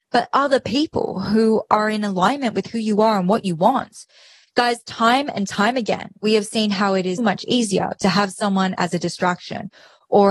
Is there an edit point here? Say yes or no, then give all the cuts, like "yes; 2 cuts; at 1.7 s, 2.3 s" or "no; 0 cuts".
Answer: yes; 1 cut; at 7.2 s